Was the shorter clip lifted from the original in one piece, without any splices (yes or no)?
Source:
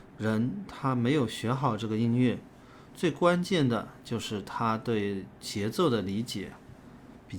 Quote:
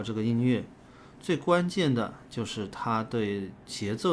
yes